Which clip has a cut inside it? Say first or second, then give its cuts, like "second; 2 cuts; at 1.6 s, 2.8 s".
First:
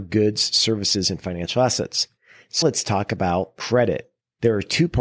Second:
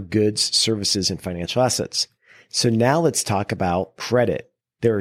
first; 1 cut; at 2.6 s